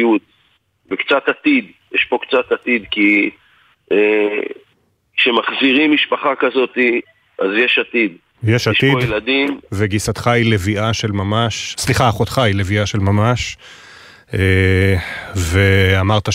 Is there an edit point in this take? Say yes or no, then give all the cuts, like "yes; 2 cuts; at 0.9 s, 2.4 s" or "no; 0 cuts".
no; 0 cuts